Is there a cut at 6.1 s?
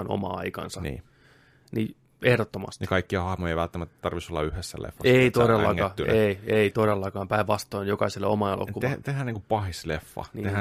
no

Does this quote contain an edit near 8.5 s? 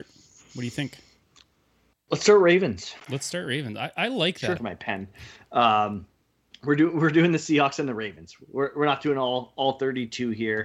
no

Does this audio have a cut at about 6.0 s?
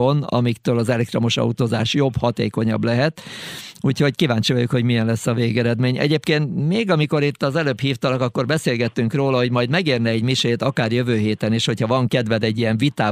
no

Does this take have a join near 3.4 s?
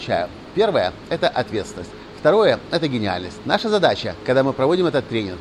yes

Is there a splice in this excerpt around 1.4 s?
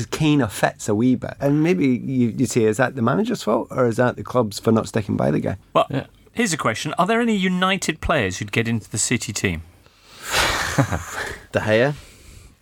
yes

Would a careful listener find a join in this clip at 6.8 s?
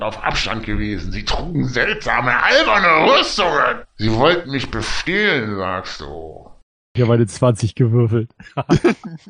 yes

